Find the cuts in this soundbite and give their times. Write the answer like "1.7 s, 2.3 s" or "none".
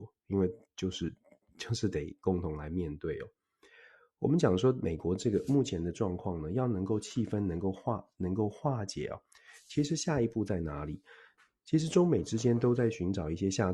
none